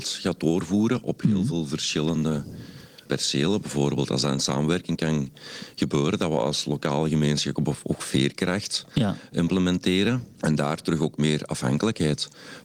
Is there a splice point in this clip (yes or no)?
yes